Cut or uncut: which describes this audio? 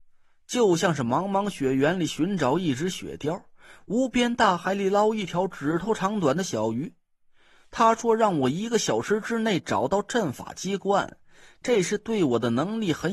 uncut